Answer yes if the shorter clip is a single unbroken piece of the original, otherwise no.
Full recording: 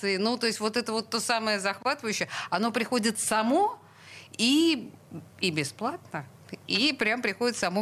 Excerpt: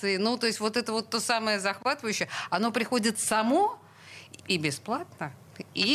no